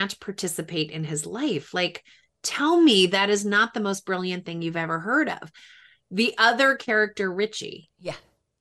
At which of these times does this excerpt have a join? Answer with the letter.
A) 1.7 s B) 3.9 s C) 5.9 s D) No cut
D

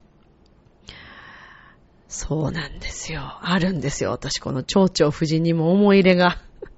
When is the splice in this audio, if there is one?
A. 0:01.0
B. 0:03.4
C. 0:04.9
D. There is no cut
D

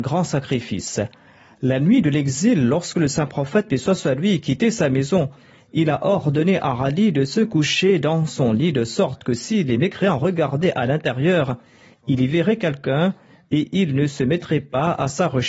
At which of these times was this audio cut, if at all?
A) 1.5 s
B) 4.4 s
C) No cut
C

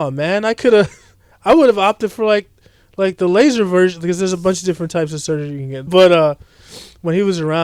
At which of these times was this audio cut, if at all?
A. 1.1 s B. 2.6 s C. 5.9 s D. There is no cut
C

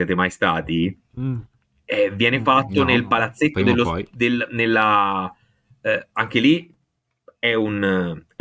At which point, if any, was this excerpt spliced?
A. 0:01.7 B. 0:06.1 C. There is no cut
C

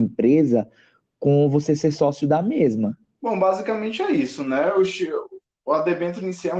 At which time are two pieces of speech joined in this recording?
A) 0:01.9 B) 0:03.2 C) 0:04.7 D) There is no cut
B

